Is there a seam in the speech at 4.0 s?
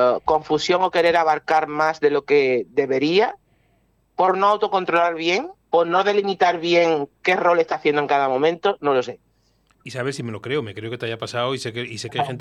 no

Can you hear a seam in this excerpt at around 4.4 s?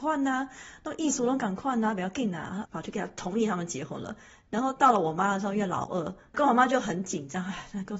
no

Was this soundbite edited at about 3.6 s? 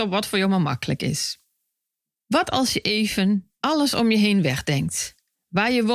yes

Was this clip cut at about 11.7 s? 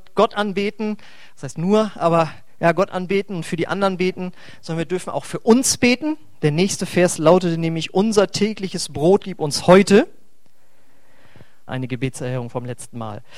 yes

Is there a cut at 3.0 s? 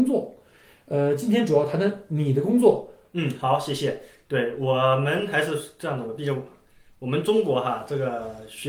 yes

